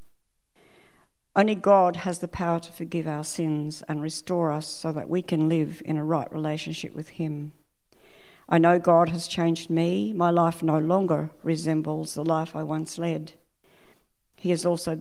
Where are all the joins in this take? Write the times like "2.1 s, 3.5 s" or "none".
none